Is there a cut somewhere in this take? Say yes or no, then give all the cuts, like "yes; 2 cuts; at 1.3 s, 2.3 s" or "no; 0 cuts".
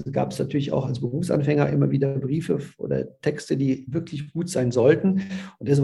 no; 0 cuts